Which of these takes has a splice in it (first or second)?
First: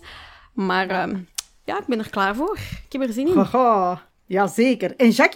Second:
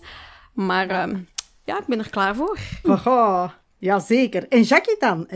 second